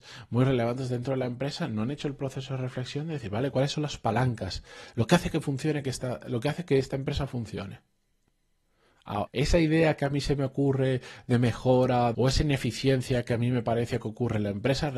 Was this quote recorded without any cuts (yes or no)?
no